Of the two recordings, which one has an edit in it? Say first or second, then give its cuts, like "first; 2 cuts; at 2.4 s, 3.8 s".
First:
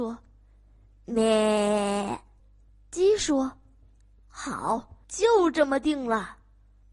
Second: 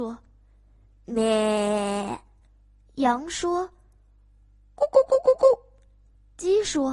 first; 2 cuts; at 2.4 s, 5.0 s